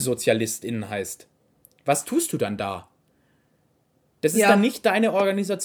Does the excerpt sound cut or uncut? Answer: uncut